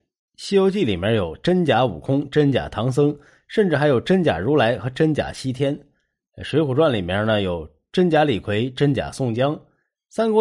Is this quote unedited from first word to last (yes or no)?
yes